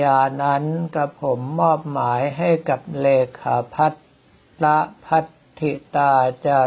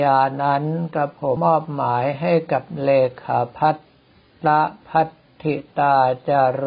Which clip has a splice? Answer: second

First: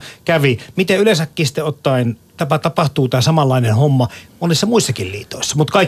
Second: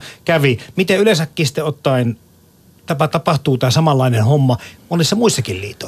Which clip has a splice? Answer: first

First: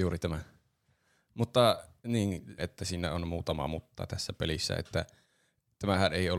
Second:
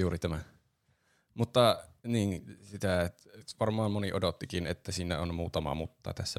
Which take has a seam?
first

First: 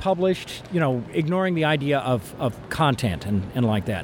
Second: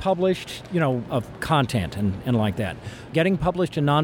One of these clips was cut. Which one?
second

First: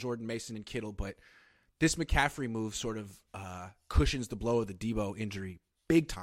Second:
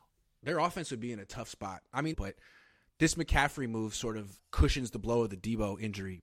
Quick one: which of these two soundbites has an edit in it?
second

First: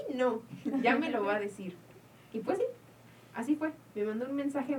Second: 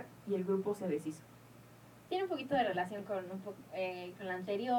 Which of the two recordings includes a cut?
second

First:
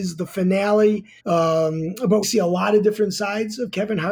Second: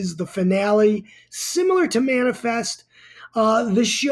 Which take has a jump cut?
first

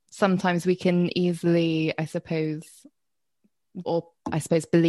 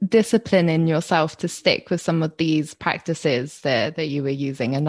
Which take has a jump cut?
first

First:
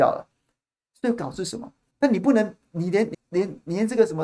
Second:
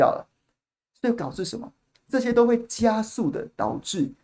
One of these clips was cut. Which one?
first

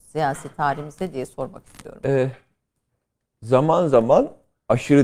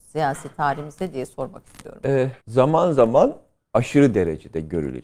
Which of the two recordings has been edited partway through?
second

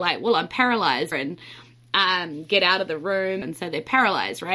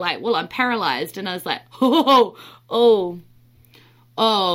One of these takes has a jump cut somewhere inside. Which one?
first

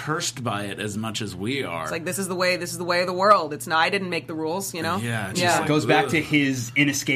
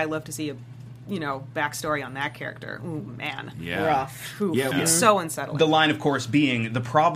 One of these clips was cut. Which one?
second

